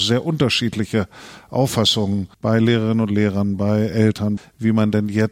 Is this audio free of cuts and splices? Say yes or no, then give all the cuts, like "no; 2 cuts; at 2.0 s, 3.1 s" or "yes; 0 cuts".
no; 2 cuts; at 2.3 s, 4.4 s